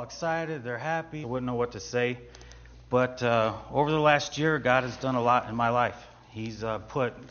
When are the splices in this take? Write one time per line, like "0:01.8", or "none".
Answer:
0:01.2